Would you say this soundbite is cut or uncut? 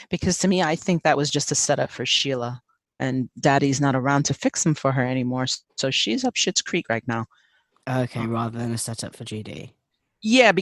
cut